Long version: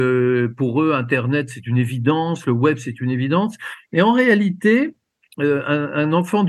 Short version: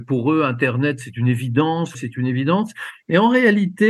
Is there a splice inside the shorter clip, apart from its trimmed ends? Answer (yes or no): yes